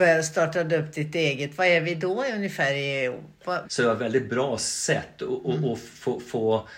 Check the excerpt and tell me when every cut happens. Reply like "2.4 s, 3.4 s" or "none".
3.6 s

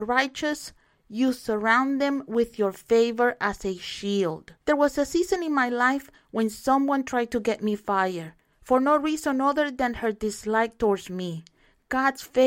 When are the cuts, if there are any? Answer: 4.6 s

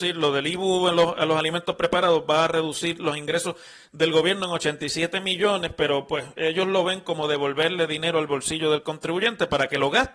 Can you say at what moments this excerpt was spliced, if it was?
none

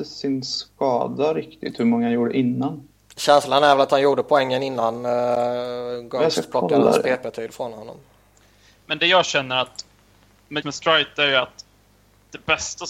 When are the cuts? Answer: 10.6 s

